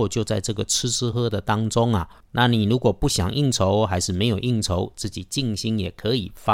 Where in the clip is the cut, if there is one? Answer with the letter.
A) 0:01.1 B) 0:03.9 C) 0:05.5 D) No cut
A